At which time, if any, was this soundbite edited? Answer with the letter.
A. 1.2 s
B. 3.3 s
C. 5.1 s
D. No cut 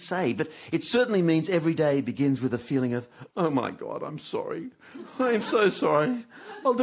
B